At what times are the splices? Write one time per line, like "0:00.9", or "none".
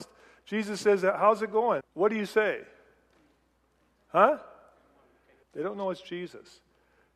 0:01.8
0:05.4